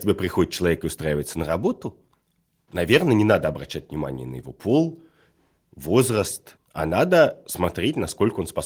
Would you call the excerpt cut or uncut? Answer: cut